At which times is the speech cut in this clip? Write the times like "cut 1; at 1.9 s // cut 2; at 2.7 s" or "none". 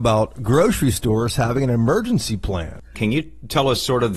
cut 1; at 2.9 s